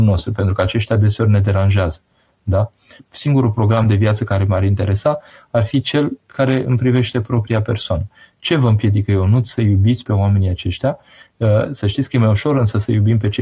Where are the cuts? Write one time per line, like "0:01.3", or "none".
0:03.0

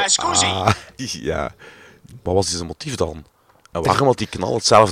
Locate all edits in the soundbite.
0:01.0
0:02.3

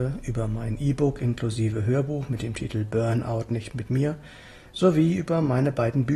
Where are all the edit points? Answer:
none

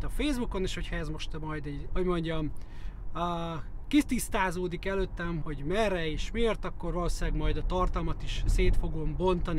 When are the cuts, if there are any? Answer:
0:01.9
0:05.4

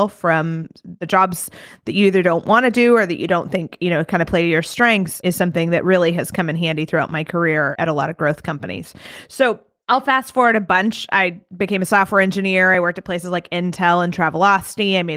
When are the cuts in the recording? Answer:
none

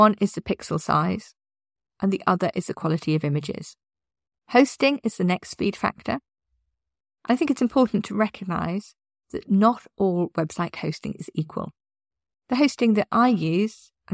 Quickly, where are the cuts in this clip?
0:04.4
0:12.3

